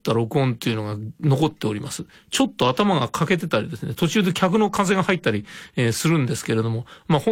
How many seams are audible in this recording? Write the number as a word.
zero